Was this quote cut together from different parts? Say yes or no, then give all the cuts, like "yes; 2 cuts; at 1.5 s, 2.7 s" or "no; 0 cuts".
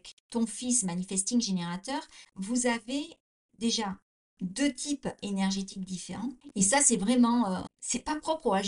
yes; 3 cuts; at 2.3 s, 6.5 s, 7.7 s